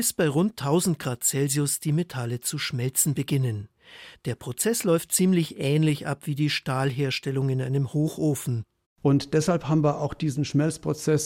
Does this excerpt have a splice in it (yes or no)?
no